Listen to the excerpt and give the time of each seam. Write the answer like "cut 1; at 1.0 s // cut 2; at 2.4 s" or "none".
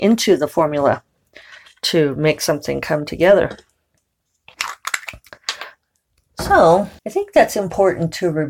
cut 1; at 7.0 s